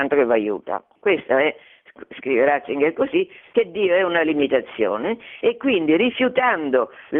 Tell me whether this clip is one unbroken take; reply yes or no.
no